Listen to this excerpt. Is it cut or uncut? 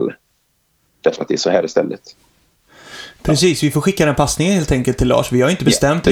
uncut